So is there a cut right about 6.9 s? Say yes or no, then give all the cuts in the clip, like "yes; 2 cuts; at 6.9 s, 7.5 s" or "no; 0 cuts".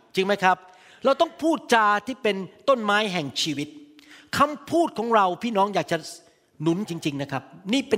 yes; 1 cut; at 6.9 s